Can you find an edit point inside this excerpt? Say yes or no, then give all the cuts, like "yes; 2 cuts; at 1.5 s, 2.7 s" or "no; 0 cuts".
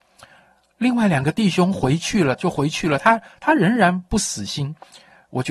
no; 0 cuts